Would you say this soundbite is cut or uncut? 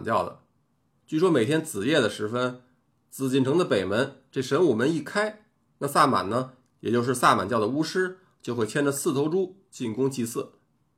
uncut